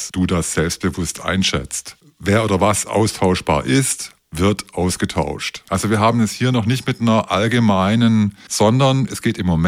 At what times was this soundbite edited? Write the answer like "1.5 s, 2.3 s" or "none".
5.7 s, 8.4 s